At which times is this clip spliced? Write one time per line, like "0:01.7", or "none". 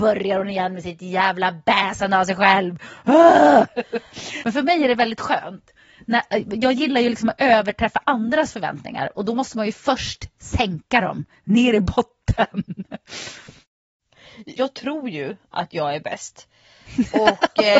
0:04.4
0:14.6